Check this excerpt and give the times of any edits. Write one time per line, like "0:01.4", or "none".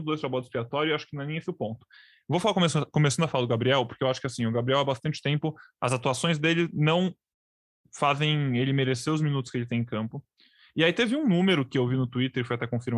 none